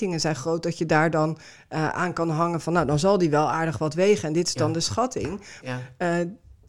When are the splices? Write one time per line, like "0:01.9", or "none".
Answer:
0:05.6